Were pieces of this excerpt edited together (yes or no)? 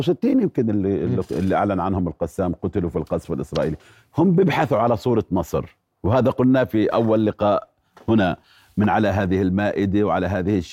no